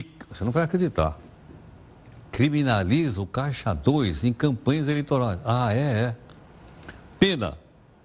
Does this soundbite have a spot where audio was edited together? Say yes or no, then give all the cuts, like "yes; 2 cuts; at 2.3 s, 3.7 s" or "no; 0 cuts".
no; 0 cuts